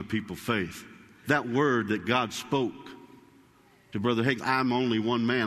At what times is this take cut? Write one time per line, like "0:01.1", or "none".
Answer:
0:01.2
0:04.4